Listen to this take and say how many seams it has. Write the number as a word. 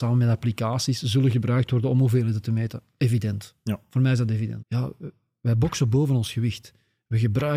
one